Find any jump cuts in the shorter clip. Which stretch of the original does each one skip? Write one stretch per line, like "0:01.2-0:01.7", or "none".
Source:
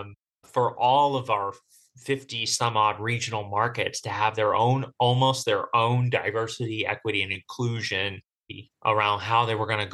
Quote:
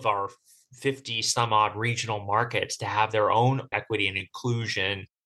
0:05.0-0:06.9